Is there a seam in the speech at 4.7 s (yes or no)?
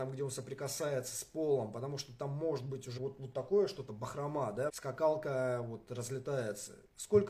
yes